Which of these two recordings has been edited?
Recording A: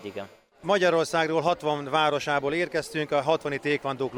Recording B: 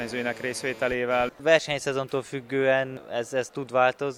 B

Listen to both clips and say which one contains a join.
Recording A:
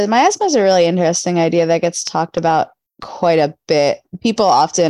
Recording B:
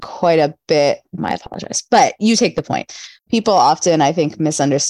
B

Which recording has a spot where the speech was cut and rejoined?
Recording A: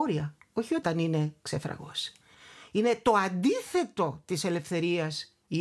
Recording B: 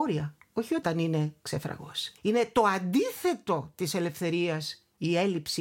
B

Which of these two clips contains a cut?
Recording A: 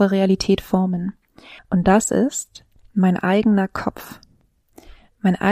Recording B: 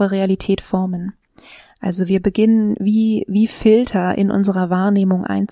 A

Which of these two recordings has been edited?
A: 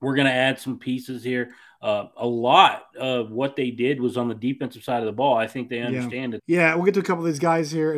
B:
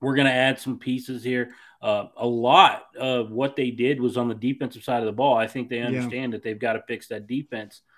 A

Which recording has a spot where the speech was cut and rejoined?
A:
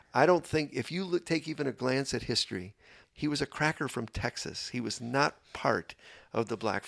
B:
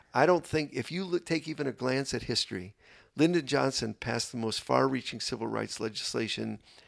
A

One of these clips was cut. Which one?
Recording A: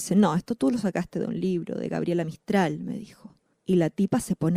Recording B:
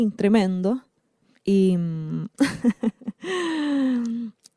A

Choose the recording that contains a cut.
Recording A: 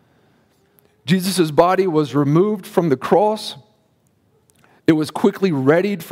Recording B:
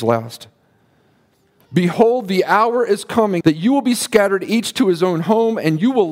B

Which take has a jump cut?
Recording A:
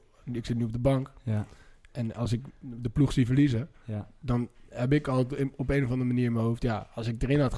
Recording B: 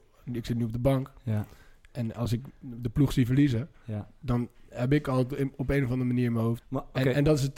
B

